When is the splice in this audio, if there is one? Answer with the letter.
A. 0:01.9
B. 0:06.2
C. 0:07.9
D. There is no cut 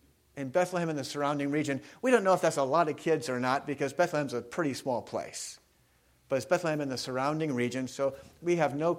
D